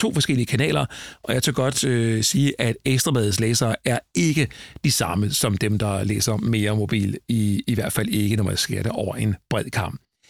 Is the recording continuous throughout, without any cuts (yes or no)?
yes